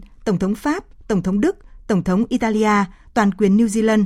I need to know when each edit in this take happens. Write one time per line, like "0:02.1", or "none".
0:03.1